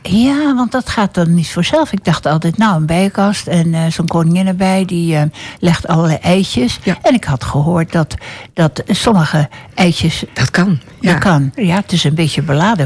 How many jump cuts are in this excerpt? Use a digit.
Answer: 2